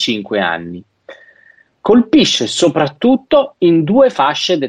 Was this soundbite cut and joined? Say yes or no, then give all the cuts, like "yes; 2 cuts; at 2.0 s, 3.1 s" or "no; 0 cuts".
no; 0 cuts